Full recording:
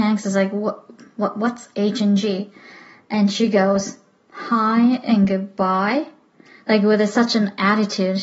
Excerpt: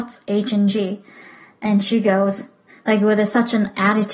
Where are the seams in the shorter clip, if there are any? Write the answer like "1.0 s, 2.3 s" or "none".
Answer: 2.7 s

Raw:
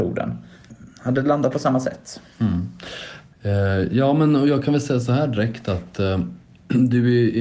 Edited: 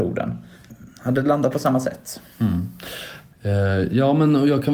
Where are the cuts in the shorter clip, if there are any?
none

